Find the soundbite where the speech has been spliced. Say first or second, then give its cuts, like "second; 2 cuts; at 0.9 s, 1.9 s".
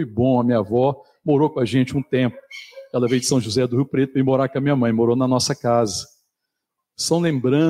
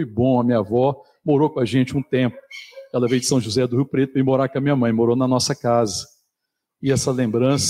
first; 1 cut; at 6.8 s